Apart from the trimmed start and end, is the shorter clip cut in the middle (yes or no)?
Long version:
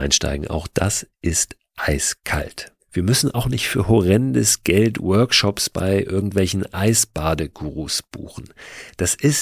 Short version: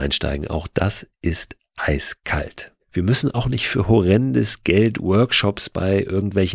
no